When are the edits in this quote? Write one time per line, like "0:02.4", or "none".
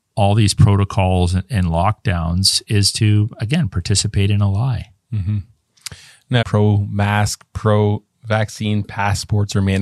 0:06.4

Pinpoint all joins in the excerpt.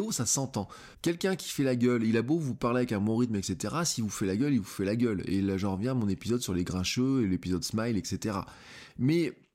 0:00.9

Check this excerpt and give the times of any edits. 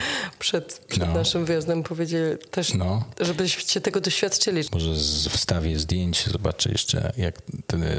0:04.6

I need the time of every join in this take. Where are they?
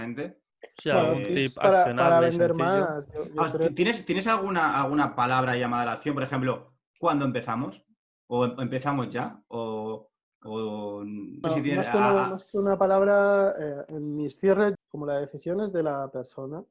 0:11.4
0:14.7

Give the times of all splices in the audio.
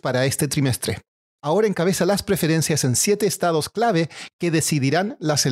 0:01.4

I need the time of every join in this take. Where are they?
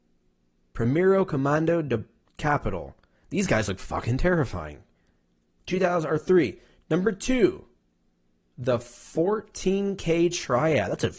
none

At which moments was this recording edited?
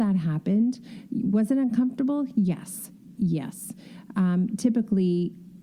0:03.2

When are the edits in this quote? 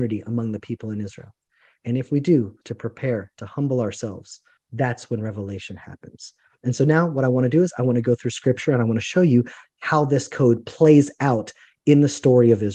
0:02.6
0:04.6

